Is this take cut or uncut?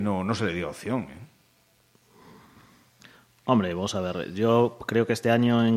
uncut